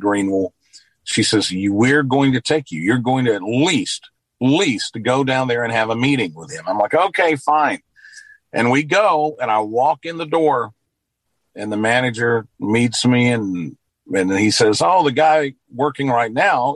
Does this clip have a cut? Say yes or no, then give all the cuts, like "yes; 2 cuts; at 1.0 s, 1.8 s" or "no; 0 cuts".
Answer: no; 0 cuts